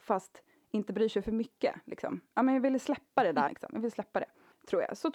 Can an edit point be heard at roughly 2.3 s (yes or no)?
no